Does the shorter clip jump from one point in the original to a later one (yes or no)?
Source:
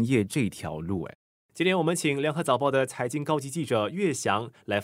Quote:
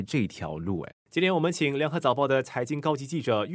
yes